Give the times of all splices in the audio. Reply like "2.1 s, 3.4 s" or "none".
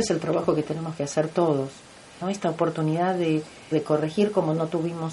2.2 s, 3.7 s